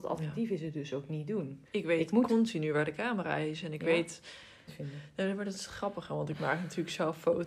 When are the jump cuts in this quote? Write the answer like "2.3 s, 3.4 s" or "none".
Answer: 1.6 s, 4.7 s